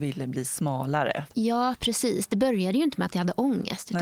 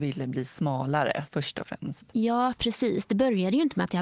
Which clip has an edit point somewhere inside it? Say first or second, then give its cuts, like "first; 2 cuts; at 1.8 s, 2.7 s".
first; 1 cut; at 1.3 s